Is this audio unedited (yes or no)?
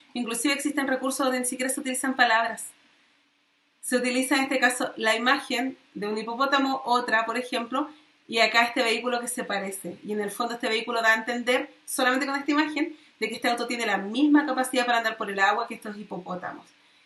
yes